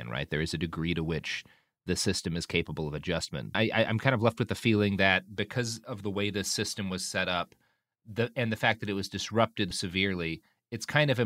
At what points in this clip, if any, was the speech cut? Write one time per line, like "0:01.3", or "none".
0:03.5
0:09.7

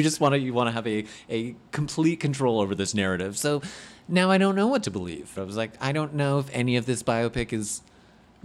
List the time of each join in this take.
0:05.4

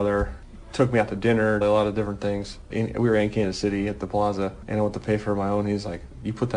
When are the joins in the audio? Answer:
0:01.6
0:02.7

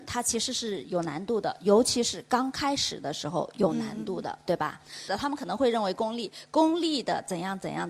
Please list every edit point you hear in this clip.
0:05.1

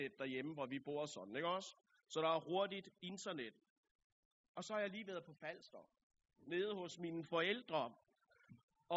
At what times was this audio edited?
none

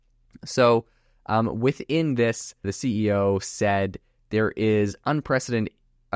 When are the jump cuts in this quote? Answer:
0:02.6

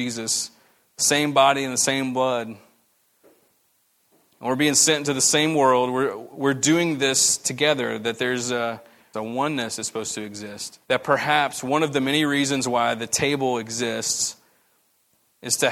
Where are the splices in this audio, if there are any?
0:09.1
0:10.8

